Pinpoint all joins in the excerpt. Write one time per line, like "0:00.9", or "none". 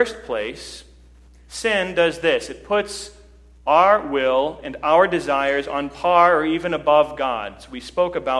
none